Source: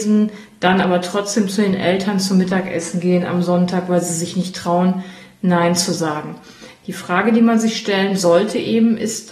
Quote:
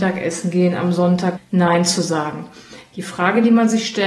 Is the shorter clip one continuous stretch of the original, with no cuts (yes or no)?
no